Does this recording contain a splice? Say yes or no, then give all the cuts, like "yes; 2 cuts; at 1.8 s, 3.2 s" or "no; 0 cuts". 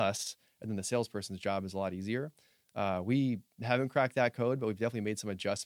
no; 0 cuts